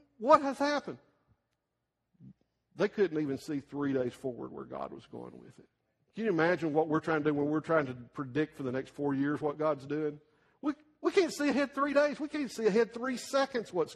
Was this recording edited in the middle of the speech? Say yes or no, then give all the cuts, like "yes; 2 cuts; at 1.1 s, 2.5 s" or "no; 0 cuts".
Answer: no; 0 cuts